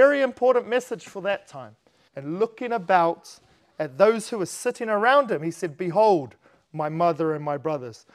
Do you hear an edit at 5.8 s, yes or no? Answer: no